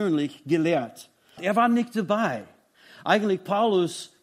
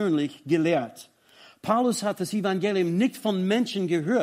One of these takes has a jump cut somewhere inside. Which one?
first; 1 cut; at 1.4 s

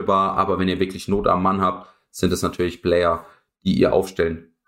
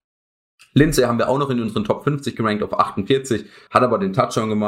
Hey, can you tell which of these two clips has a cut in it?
second; 1 cut; at 3.7 s

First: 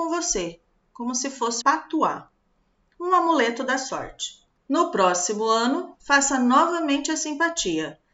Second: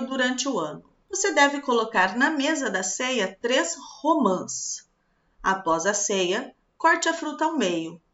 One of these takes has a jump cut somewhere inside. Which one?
first; 1 cut; at 1.6 s

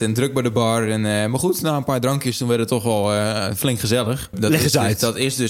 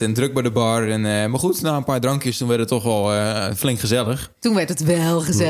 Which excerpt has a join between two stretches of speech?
first; 1 cut; at 4.3 s

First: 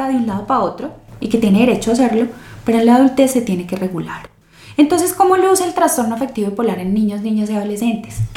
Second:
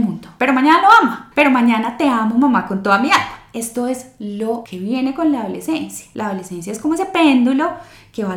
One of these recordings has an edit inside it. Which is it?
second; 1 cut; at 1.3 s

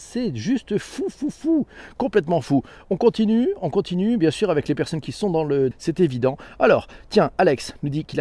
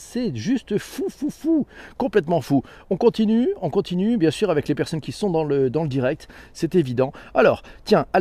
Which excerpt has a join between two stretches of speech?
first; 1 cut; at 5.7 s

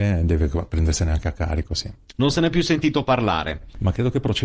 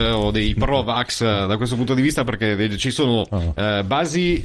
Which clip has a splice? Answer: first; 1 cut; at 2.1 s

